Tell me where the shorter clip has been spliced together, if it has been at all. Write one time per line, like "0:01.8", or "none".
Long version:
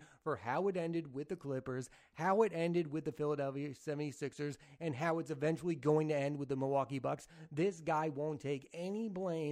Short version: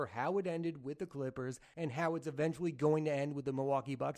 0:01.7